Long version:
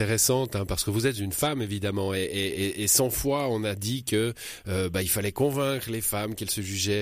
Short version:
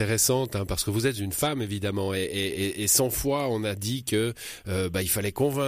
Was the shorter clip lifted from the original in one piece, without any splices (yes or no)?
yes